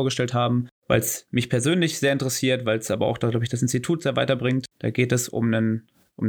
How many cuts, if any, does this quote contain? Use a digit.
1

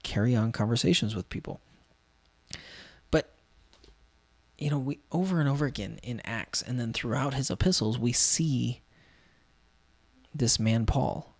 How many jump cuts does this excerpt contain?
0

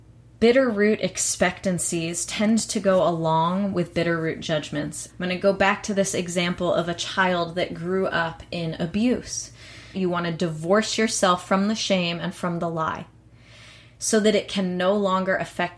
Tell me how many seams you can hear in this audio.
2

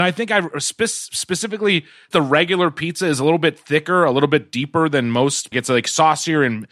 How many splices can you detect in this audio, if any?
2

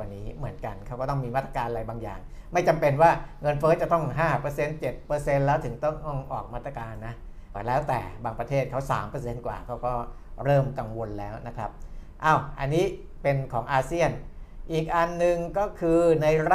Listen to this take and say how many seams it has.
1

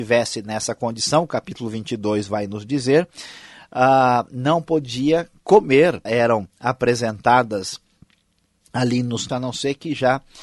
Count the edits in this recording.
2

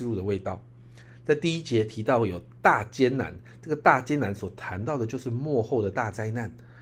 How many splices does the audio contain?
0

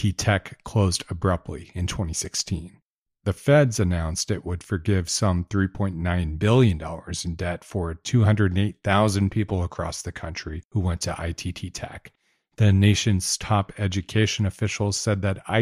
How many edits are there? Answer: 0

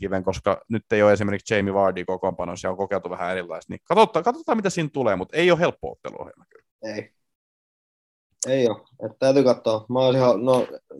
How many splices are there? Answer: 0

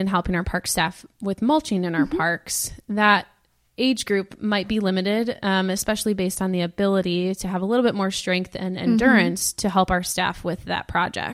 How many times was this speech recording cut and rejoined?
0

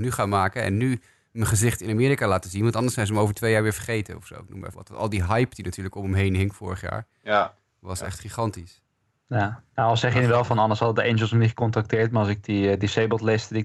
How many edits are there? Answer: 1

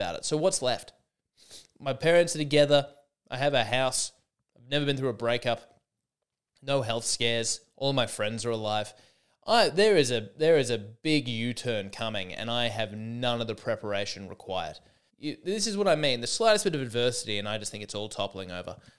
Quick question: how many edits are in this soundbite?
1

